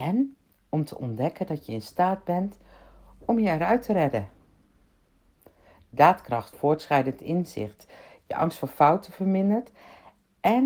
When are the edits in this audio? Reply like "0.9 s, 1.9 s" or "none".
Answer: 6.5 s

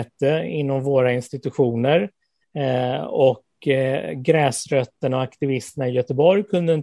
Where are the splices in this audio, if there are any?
2.4 s

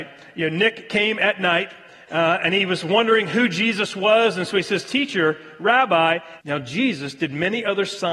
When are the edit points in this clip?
6.4 s

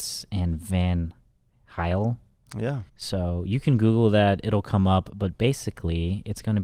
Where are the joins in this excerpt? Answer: 2.9 s

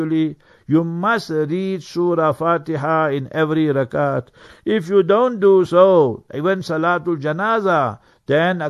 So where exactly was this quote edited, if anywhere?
none

